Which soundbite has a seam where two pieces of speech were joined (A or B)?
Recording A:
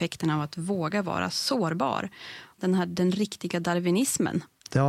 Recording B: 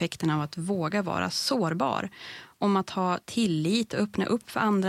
A